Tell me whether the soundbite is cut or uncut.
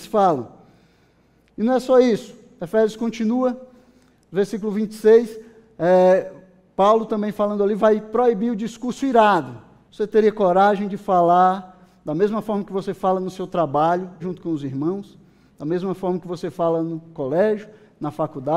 cut